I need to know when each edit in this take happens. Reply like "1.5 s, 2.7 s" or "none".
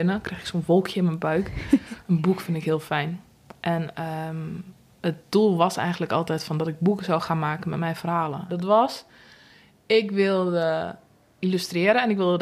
8.5 s